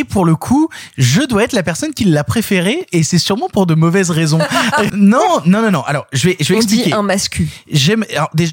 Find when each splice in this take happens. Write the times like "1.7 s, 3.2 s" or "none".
4.9 s